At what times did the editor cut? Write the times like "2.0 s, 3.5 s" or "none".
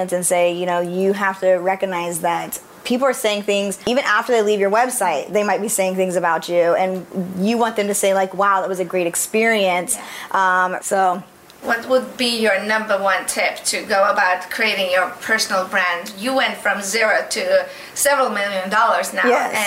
10.8 s